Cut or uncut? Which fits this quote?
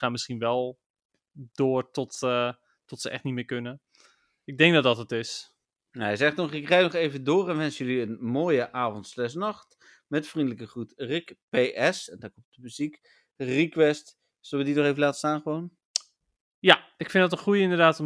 uncut